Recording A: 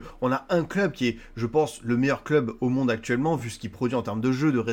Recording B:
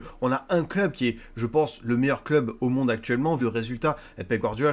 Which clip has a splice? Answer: B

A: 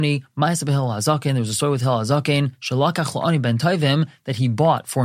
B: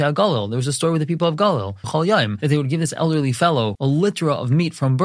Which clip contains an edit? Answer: B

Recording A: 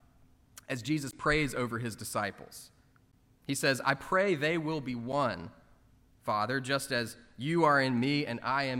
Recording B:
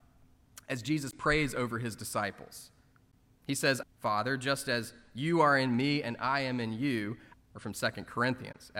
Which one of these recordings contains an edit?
B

